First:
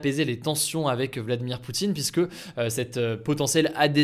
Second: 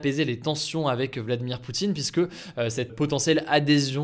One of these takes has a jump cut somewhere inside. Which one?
second; 1 cut; at 2.9 s

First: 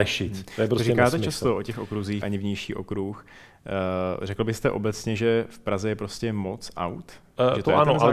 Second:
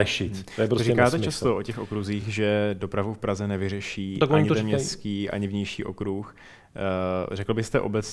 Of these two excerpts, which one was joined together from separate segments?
first; 1 cut; at 2.2 s

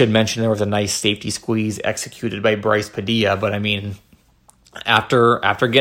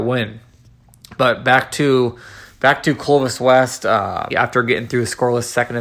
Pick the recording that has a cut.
second; 1 cut; at 4.3 s

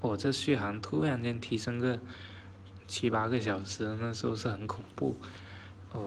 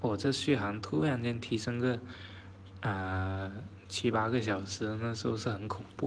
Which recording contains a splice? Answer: first; 1 cut; at 2.8 s

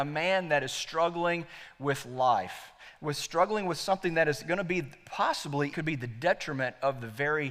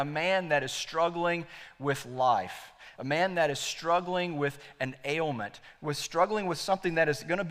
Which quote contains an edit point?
first; 2 cuts; at 3.0 s, 5.7 s

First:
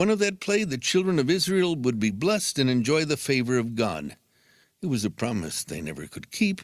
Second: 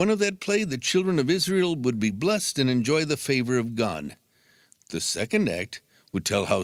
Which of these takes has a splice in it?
first; 1 cut; at 4.6 s

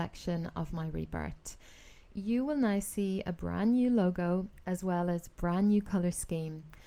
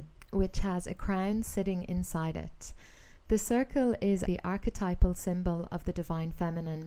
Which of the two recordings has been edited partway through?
second; 1 cut; at 4.3 s

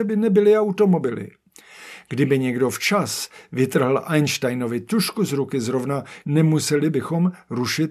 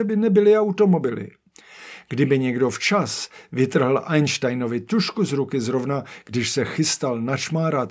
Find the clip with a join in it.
first; 1 cut; at 6.2 s

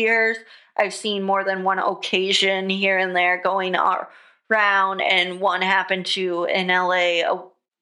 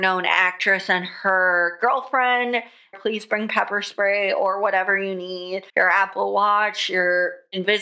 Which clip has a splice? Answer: second; 2 cuts; at 2.9 s, 5.7 s

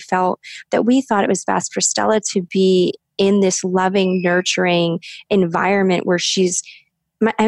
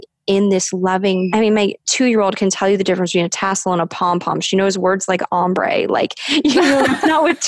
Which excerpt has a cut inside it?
second; 1 cut; at 1.3 s

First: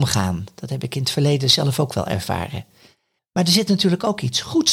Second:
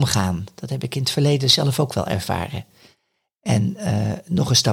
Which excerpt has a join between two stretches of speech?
first; 1 cut; at 3.2 s

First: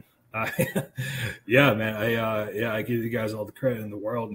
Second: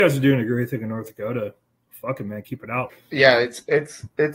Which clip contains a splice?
second; 1 cut; at 2.9 s

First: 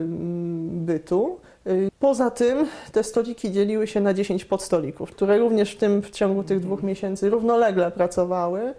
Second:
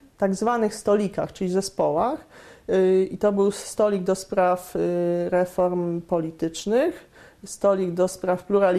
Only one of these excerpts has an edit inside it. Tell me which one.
first; 2 cuts; at 1.9 s, 5.1 s

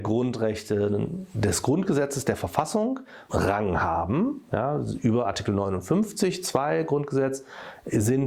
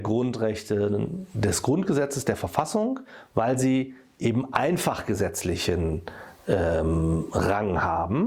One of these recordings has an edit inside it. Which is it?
first; 1 cut; at 3.3 s

